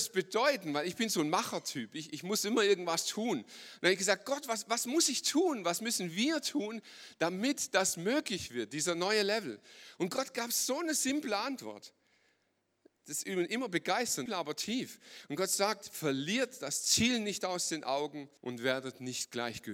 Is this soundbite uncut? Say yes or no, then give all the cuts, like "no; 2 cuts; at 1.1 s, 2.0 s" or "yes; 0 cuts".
no; 2 cuts; at 14.3 s, 18.4 s